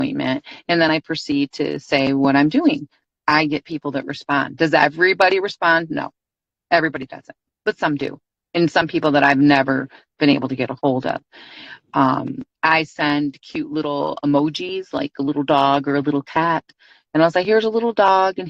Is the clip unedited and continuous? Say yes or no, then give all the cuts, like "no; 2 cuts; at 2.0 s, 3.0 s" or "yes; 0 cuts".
yes; 0 cuts